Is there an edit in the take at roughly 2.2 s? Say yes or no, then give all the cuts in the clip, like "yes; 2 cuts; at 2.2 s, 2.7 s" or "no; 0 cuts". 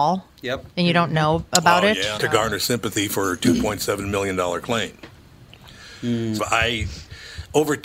yes; 2 cuts; at 2.2 s, 6.4 s